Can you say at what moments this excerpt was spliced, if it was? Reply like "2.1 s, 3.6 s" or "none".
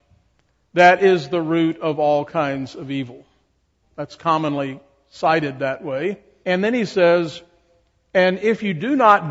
3.8 s, 6.4 s